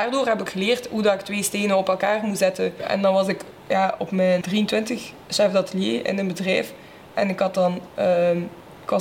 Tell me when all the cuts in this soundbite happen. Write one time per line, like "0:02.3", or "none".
0:04.4